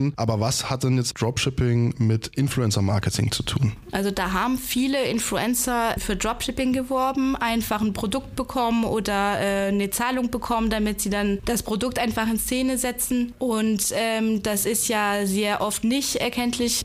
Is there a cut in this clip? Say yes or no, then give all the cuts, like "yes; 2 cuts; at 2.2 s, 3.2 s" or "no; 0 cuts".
no; 0 cuts